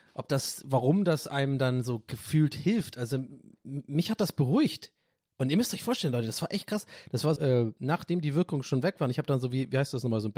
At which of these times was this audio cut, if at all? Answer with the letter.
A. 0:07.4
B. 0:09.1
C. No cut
A